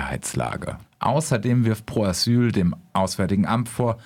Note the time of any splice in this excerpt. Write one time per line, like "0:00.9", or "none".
0:00.9

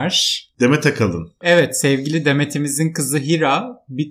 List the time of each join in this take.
none

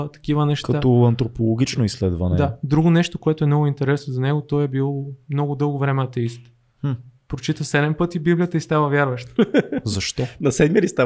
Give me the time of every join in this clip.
none

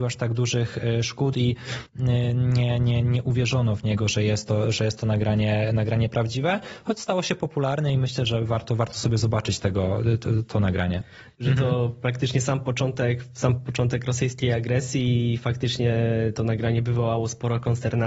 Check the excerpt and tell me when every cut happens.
0:11.3

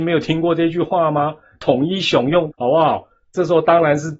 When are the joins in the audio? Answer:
0:02.5

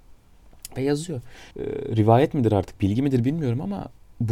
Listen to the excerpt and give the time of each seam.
0:01.5

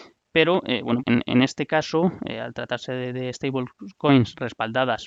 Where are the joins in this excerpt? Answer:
0:01.0

